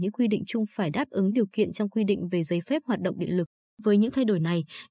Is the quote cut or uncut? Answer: uncut